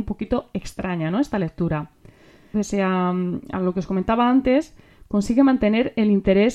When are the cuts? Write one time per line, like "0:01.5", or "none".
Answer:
0:02.5